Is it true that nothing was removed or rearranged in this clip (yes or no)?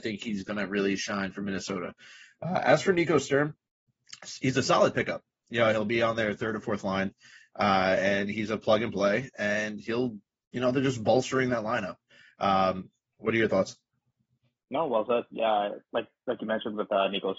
yes